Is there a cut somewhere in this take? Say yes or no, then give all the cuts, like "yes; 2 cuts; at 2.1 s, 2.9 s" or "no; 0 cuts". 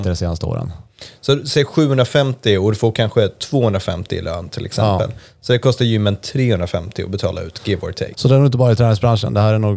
yes; 1 cut; at 8.1 s